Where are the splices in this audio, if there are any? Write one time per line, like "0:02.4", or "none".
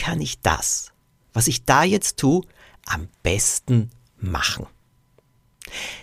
none